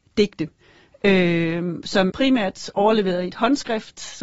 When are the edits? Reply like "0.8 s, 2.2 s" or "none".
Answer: 2.1 s